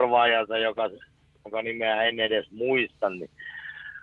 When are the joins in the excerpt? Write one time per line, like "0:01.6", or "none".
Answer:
none